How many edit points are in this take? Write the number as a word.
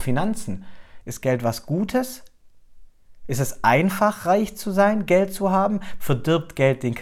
one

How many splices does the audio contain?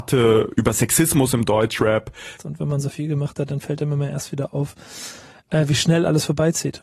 one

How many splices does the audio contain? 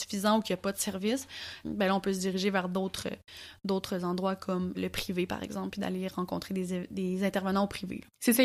two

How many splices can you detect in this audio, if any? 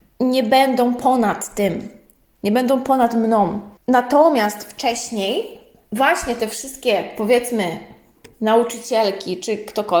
one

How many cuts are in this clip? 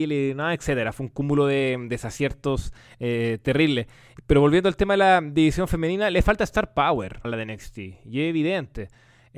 one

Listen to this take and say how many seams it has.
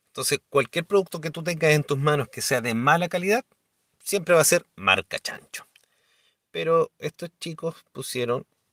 zero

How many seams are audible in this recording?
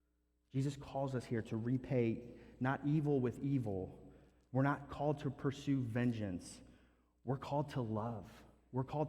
zero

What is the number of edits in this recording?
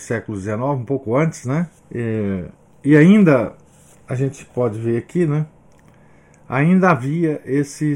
one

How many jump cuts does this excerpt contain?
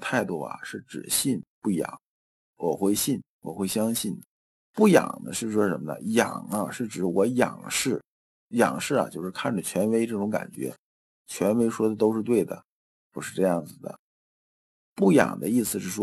one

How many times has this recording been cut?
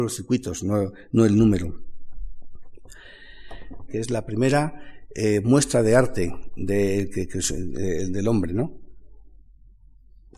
one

